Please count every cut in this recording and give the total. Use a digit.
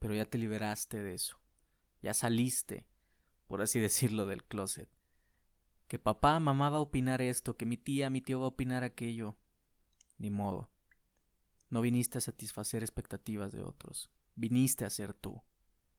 0